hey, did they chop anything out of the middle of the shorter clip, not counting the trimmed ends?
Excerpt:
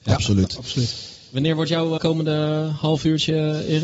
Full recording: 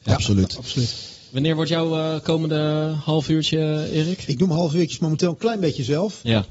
yes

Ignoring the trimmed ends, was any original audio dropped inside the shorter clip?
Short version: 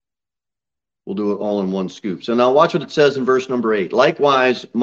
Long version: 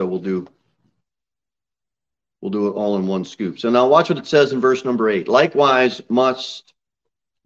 no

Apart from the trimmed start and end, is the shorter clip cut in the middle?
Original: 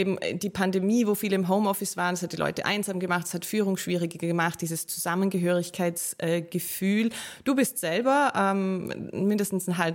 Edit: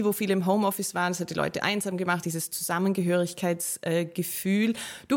yes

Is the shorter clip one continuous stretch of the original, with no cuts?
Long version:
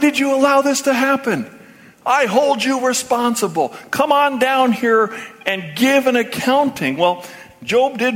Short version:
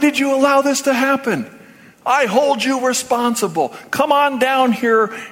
yes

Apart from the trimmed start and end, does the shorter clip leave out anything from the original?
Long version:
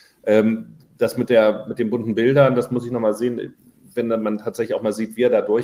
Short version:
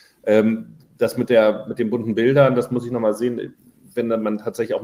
no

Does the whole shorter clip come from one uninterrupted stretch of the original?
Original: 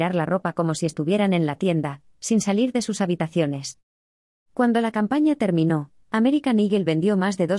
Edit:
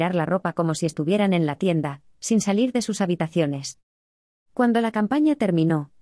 yes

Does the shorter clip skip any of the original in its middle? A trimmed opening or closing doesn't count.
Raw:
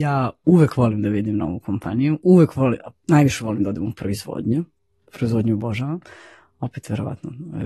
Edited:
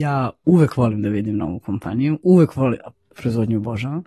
yes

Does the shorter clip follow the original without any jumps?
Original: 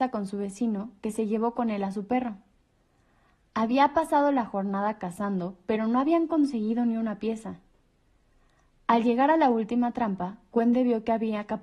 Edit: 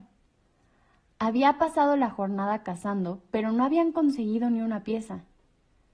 yes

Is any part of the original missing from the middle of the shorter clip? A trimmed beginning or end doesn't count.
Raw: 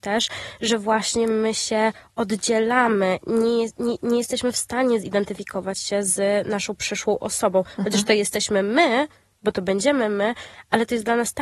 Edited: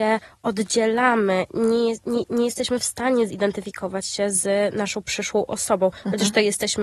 no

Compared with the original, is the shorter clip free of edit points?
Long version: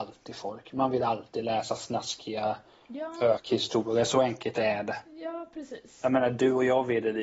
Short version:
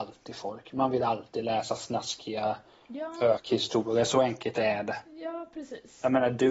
yes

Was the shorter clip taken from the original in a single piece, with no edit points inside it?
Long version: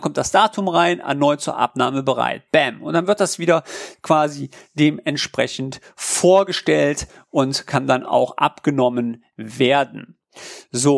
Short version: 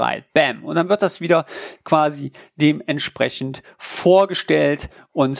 yes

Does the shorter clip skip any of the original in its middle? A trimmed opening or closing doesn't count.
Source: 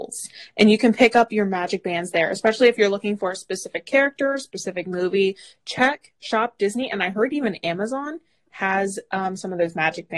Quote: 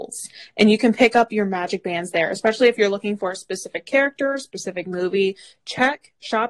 no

